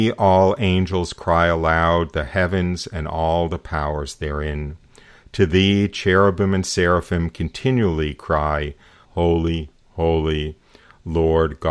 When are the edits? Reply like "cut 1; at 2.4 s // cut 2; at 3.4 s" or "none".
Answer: cut 1; at 9.0 s